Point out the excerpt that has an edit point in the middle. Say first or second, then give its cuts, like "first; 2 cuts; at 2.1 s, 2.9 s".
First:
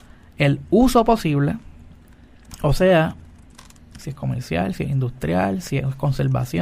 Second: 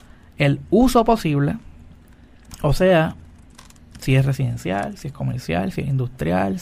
first; 1 cut; at 4.0 s